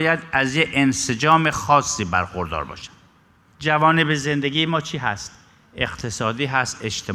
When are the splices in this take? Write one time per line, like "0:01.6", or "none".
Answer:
none

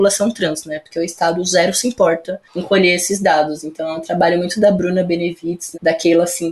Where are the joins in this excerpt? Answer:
none

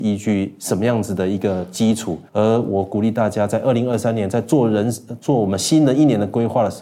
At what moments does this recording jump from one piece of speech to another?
0:02.3

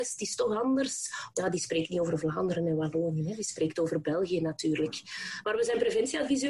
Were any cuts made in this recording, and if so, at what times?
0:01.3
0:05.4

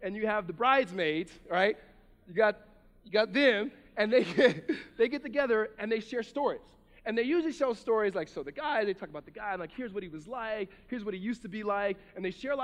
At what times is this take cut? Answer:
none

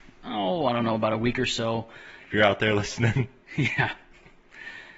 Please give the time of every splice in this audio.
0:02.2

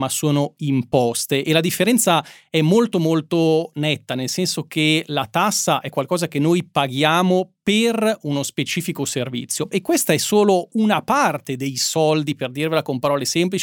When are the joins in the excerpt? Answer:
0:09.7

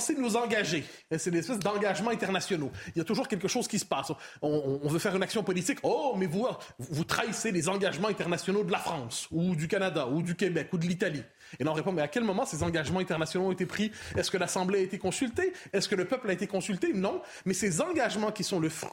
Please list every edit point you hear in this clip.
none

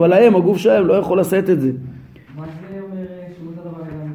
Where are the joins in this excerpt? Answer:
0:02.3

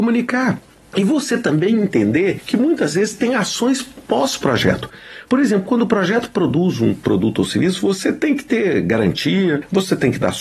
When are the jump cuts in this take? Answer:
none

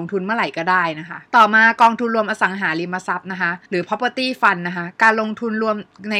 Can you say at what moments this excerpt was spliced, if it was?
0:01.3
0:03.6

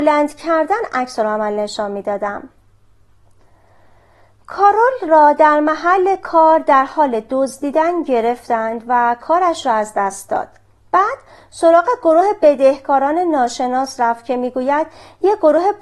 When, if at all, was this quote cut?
none

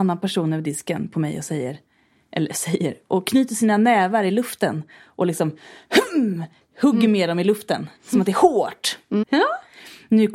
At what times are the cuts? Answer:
0:08.0
0:09.2

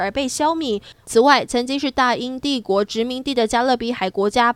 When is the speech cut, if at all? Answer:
0:01.0

